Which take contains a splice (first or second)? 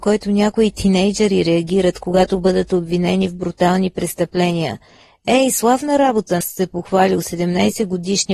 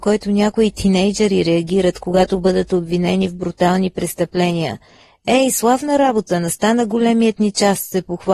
first